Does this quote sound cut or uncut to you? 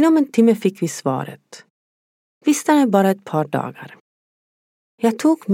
cut